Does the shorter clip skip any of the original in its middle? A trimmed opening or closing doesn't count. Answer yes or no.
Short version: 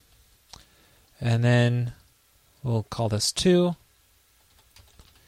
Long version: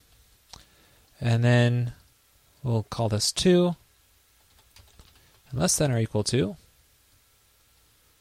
no